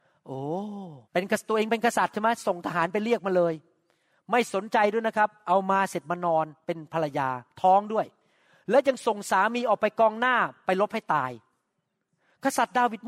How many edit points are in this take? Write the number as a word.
one